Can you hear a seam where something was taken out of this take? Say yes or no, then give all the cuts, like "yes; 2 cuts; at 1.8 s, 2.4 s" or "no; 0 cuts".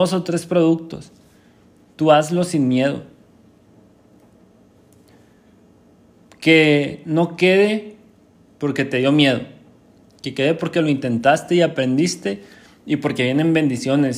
no; 0 cuts